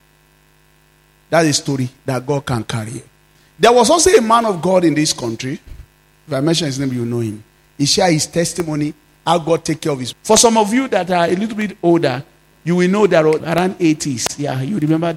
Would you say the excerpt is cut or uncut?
cut